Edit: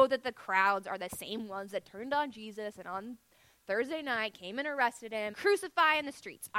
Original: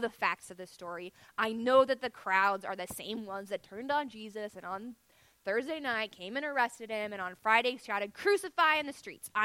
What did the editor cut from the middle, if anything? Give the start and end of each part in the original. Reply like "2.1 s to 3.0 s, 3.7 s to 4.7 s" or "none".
7.1 s to 8.1 s